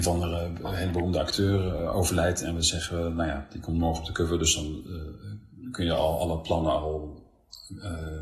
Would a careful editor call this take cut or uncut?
uncut